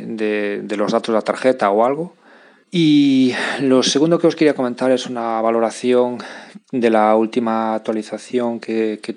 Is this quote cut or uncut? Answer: cut